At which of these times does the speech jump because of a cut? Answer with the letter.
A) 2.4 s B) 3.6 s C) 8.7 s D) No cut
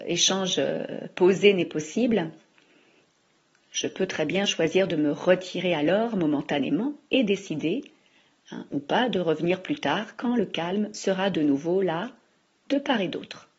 D